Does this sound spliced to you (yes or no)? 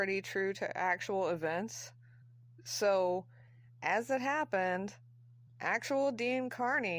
no